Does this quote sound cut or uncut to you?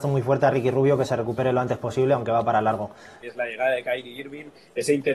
cut